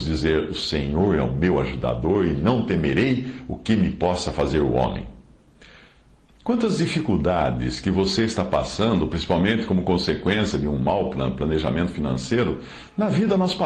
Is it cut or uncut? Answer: uncut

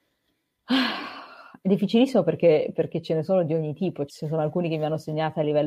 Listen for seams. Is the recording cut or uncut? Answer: cut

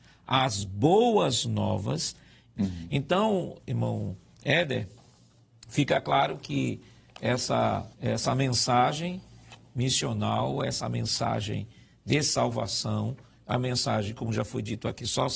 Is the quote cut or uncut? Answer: cut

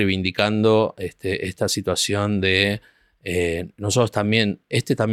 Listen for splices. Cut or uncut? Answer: uncut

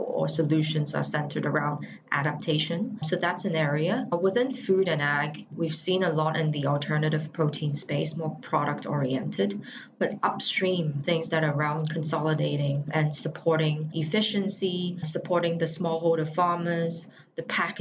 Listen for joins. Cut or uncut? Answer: uncut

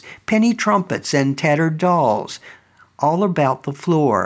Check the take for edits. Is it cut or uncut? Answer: uncut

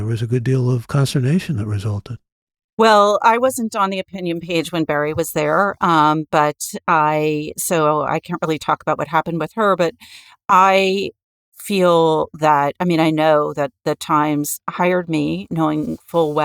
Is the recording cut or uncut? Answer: uncut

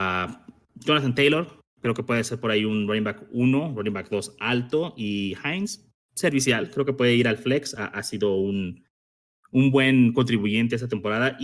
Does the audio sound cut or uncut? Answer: uncut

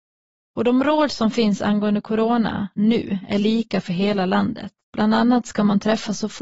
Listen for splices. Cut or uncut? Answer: cut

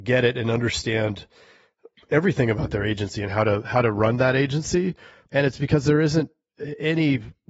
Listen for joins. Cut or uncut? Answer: cut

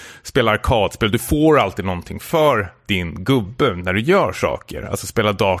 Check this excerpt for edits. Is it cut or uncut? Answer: uncut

